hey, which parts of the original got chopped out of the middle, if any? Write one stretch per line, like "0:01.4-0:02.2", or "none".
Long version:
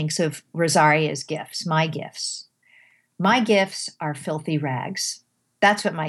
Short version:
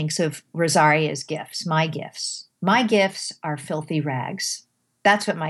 0:02.6-0:03.1